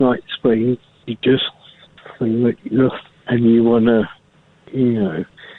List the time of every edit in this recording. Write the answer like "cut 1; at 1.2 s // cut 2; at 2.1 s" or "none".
cut 1; at 3.1 s

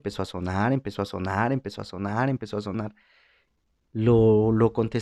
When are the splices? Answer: cut 1; at 3.8 s

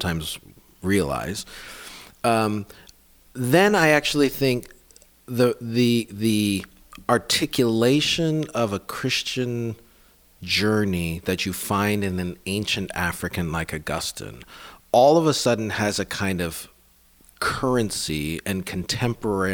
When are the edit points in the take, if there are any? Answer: none

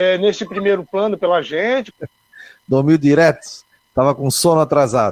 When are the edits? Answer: cut 1; at 1.9 s

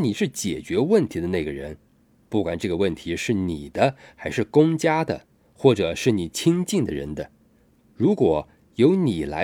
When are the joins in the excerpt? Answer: none

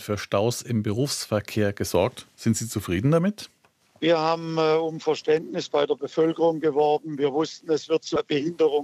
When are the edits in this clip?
none

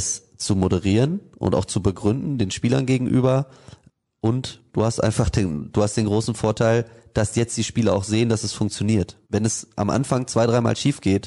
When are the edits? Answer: cut 1; at 5.7 s // cut 2; at 9.2 s

